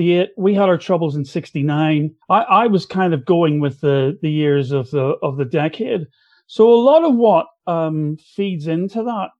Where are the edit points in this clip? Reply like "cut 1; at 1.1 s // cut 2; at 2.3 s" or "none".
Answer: cut 1; at 2.2 s